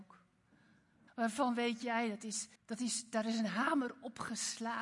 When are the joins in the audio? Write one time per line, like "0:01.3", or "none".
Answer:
0:01.1
0:02.6